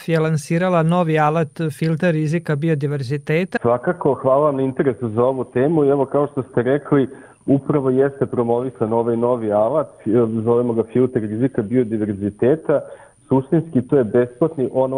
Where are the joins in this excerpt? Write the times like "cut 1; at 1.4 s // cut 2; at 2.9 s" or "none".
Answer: cut 1; at 3.6 s